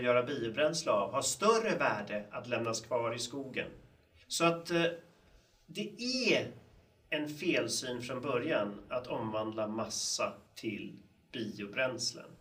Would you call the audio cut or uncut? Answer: cut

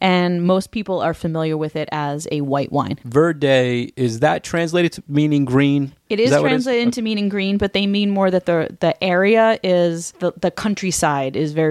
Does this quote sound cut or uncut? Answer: cut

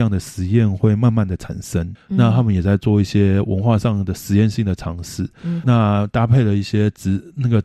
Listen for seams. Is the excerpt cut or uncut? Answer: cut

